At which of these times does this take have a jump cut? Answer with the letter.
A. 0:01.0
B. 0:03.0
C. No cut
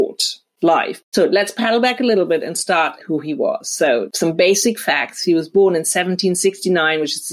B